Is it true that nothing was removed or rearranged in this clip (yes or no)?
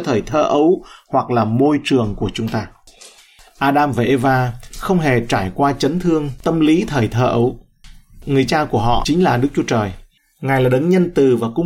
yes